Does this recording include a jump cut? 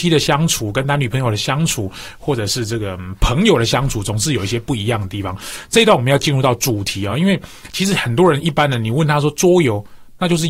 no; 0 cuts

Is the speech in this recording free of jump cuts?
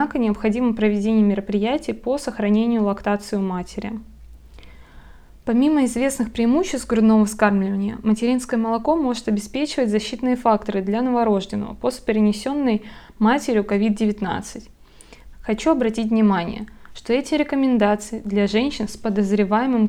no; 1 cut; at 15.3 s

